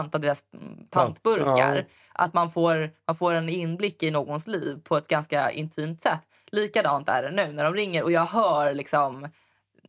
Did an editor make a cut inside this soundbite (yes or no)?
no